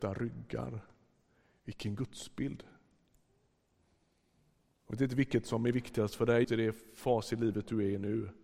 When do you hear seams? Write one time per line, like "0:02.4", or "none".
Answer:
0:06.4

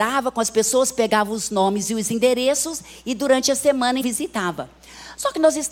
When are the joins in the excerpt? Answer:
0:04.0

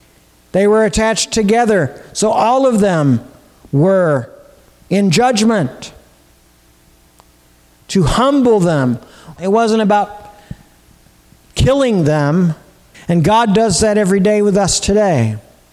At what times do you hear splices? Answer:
0:09.4
0:12.9

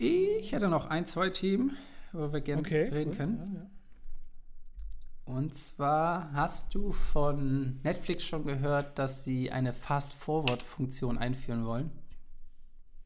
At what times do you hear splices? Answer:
none

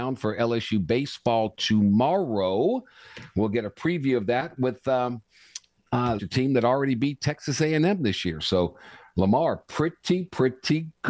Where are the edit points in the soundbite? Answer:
0:06.2

